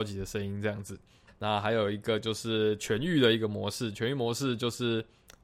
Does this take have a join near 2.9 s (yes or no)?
no